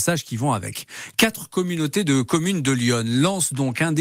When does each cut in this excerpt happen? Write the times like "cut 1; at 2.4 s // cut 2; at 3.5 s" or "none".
none